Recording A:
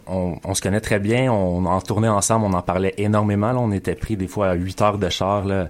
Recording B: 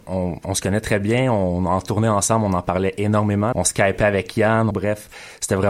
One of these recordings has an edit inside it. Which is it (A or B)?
B